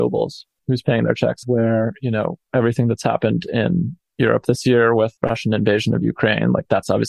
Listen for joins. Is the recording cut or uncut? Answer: cut